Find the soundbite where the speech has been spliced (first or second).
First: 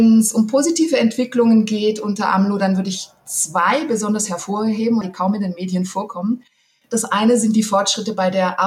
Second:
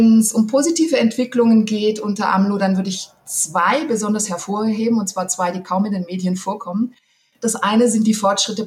first